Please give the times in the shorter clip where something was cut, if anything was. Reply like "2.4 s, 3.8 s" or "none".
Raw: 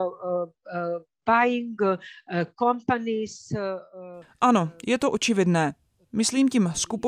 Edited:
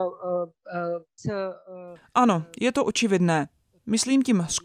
1.2 s